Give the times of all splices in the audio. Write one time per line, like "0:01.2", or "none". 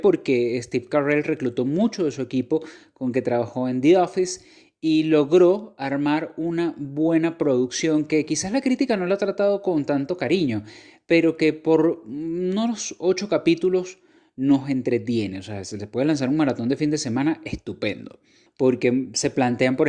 0:18.5